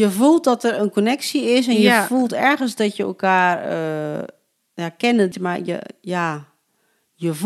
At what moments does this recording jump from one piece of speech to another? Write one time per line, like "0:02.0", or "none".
0:05.3